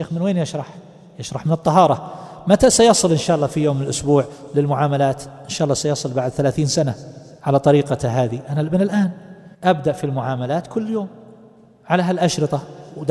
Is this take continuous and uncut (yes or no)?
no